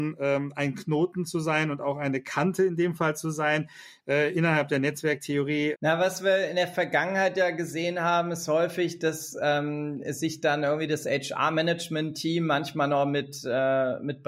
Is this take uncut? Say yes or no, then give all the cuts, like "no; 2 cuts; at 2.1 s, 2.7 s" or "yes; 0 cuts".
no; 1 cut; at 5.7 s